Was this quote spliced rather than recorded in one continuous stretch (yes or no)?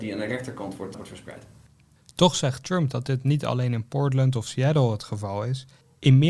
yes